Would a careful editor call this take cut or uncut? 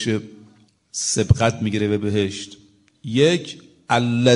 uncut